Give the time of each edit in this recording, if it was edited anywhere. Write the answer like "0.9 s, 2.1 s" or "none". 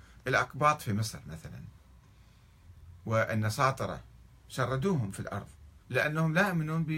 5.8 s